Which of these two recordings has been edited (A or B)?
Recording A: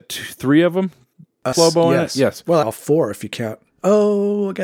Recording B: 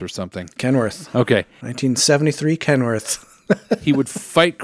A